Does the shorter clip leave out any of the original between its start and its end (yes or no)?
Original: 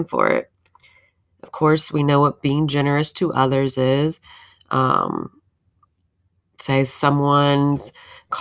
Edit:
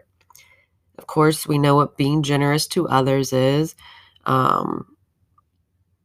no